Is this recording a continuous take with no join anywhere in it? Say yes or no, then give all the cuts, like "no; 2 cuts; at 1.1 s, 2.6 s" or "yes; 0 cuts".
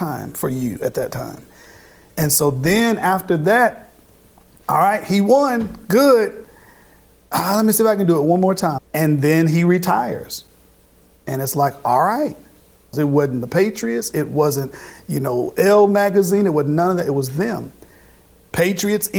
no; 2 cuts; at 8.8 s, 12.9 s